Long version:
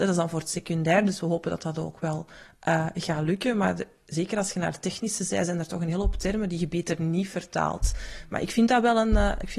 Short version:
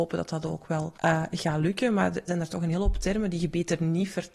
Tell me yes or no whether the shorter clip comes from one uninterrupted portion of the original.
no